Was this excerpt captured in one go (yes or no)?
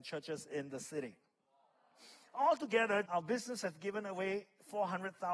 no